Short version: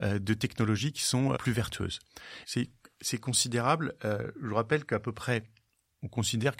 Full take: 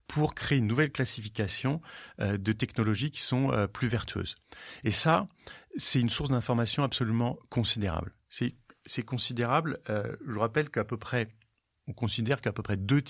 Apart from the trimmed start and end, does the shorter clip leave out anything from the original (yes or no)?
yes